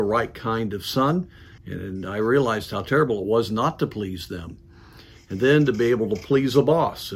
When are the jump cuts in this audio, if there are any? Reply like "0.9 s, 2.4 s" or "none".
1.6 s